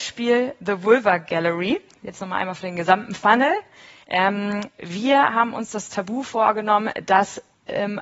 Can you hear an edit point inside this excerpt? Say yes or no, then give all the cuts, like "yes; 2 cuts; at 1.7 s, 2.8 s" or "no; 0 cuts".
yes; 1 cut; at 4.0 s